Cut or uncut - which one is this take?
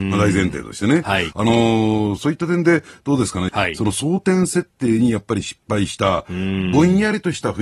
cut